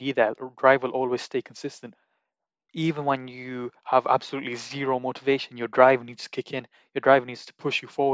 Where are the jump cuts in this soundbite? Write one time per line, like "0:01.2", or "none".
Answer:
none